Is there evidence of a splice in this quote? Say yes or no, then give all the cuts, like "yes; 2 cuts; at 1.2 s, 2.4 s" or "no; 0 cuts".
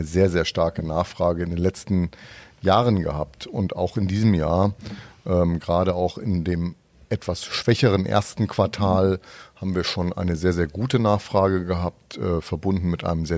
no; 0 cuts